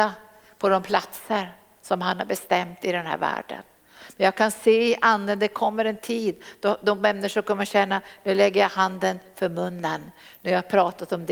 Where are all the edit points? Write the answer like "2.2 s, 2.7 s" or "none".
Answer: none